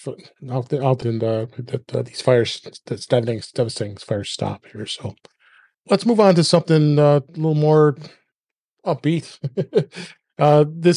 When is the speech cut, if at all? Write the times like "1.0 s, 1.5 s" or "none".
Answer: 1.0 s, 5.7 s